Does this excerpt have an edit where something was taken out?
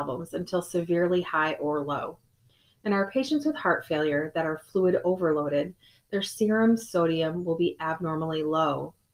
no; 0 cuts

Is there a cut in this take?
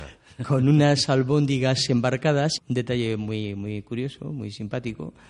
yes; 1 cut; at 2.6 s

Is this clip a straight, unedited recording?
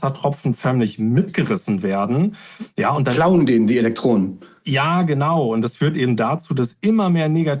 yes; 0 cuts

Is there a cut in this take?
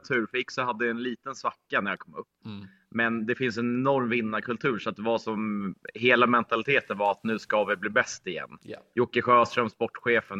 no; 0 cuts

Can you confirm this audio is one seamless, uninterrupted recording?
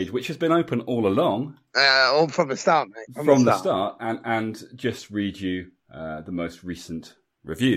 yes; 0 cuts

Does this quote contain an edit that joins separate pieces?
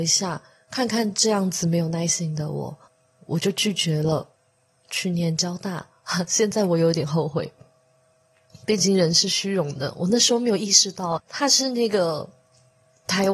yes; 1 cut; at 11.2 s

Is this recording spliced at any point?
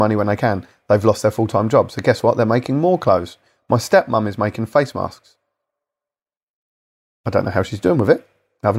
no; 0 cuts

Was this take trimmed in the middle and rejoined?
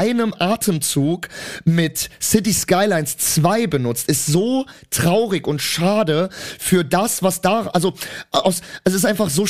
no; 0 cuts

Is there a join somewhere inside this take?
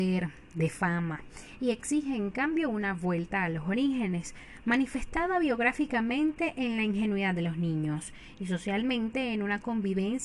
no; 0 cuts

